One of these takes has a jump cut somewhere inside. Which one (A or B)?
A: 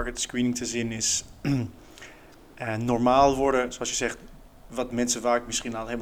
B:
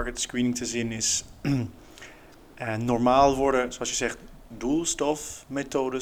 B